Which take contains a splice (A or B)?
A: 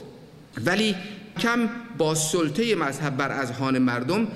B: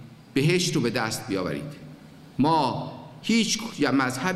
A